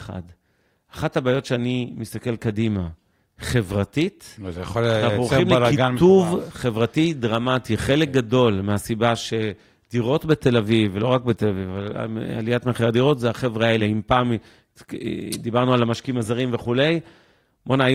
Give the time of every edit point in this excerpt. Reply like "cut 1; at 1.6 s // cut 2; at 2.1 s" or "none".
none